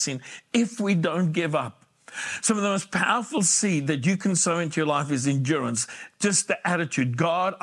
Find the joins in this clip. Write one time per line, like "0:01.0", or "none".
none